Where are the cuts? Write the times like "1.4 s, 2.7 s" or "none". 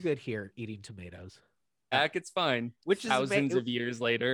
1.9 s